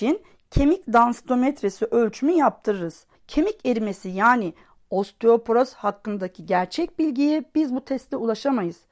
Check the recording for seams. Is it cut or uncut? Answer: cut